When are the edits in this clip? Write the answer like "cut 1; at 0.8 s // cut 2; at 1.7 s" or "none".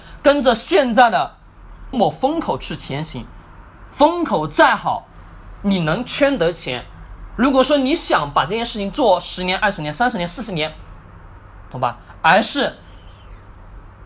cut 1; at 1.9 s // cut 2; at 11.7 s